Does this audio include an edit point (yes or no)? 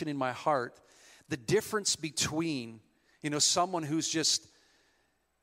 no